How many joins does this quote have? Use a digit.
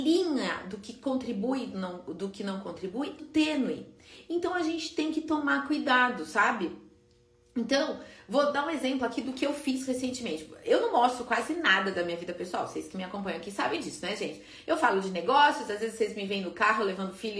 1